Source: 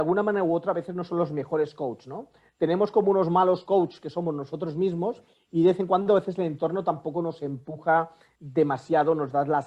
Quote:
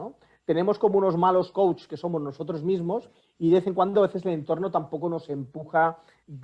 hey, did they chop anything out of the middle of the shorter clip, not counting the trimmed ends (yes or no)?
no